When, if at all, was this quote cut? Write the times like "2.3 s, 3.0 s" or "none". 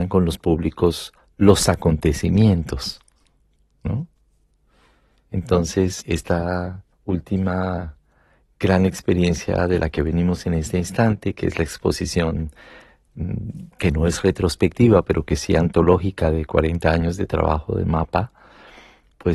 5.3 s, 6.9 s, 13.7 s